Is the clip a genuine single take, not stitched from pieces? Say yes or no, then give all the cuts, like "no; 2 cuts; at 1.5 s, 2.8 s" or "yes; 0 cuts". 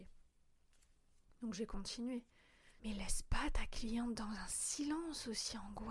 no; 1 cut; at 2.8 s